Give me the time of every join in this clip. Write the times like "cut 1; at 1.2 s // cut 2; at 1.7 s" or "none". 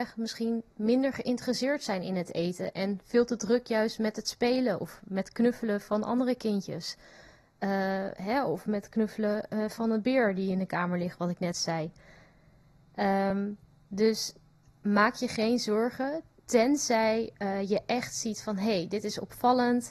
none